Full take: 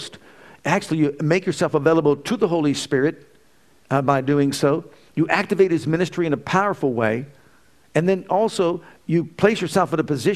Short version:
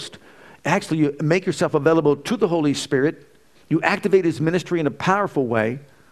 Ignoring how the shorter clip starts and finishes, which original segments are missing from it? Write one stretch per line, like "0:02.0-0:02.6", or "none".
0:03.5-0:05.0